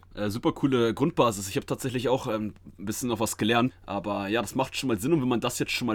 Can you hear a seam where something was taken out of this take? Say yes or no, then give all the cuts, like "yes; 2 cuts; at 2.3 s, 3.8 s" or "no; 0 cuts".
yes; 1 cut; at 3.7 s